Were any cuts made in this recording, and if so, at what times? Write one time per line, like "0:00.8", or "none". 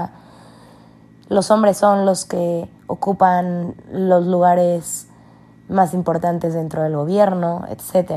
0:02.8

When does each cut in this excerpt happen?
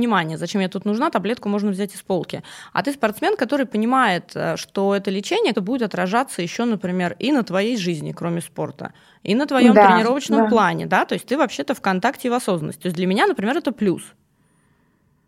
0:05.5

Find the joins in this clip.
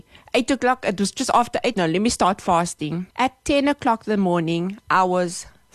0:01.7
0:03.1

